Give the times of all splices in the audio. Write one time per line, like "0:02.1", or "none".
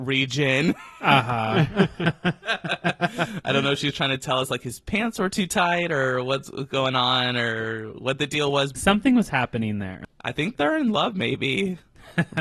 0:08.7